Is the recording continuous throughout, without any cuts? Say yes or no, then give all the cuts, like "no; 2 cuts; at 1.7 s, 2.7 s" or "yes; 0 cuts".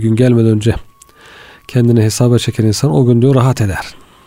yes; 0 cuts